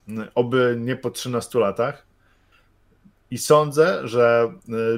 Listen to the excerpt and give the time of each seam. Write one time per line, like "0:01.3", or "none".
none